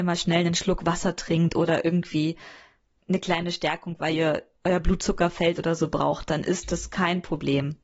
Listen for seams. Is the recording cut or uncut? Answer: uncut